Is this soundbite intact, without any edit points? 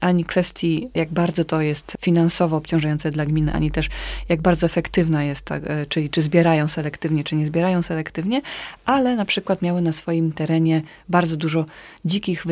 yes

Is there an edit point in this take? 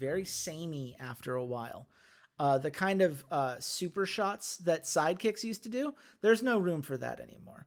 no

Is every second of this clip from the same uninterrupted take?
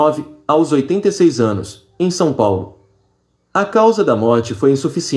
yes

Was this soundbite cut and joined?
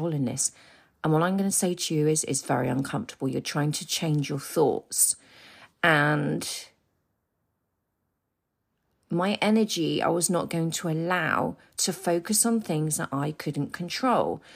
no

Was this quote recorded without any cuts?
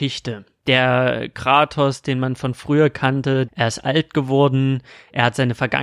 no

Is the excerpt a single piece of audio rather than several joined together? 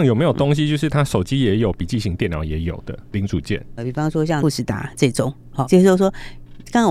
no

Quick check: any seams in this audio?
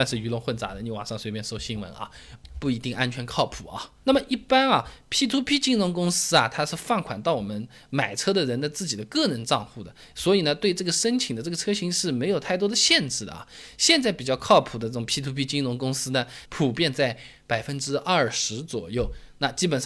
yes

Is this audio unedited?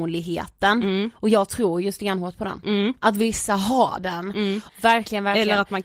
no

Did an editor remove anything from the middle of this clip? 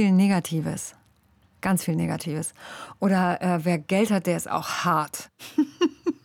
no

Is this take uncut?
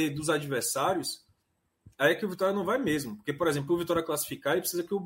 yes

